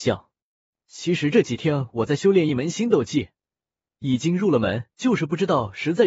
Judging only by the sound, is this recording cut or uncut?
cut